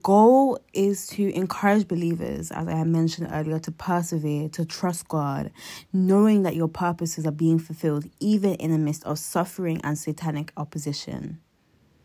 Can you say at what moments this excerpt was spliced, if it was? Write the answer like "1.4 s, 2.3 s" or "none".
none